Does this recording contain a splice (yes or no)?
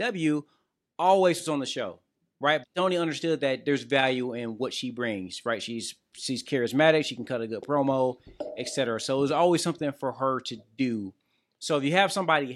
yes